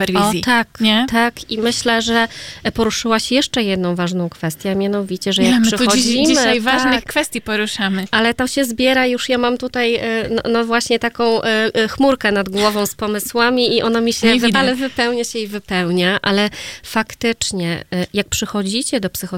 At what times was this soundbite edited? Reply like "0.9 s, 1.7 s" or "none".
14.5 s